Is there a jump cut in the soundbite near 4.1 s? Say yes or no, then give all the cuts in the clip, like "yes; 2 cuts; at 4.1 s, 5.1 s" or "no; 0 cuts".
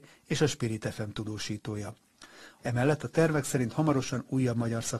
no; 1 cut; at 2.6 s